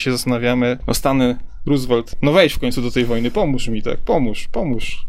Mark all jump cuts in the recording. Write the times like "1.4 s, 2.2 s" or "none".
none